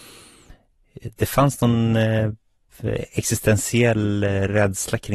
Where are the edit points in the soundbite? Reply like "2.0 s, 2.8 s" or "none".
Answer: none